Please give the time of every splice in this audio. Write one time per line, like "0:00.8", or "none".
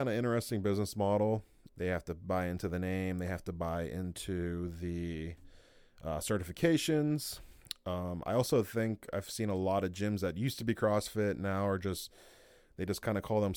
0:01.7

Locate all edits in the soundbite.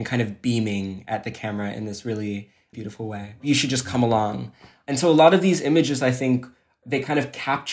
0:03.4

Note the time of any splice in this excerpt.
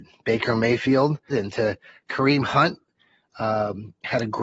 0:01.3

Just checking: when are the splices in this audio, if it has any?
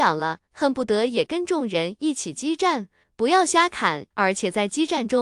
0:03.0
0:04.1

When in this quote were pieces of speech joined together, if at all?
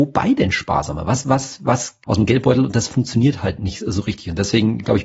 0:02.0

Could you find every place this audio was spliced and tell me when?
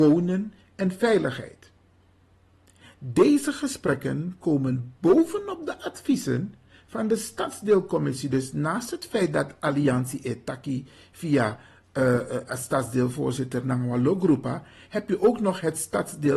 none

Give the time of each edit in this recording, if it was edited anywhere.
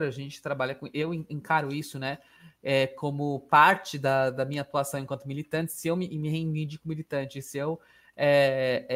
none

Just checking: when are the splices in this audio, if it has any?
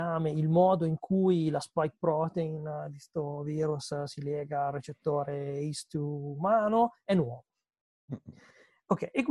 none

